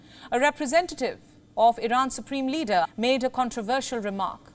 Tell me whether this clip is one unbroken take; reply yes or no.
no